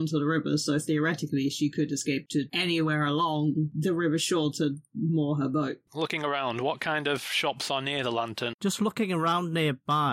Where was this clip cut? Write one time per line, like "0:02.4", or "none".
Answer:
0:05.9
0:08.5